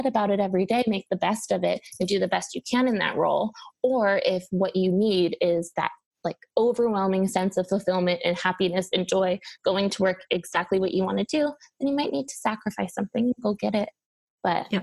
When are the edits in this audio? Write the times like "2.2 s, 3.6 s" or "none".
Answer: none